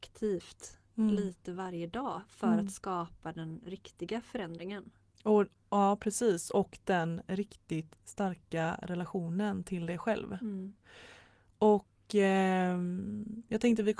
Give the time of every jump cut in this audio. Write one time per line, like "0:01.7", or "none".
none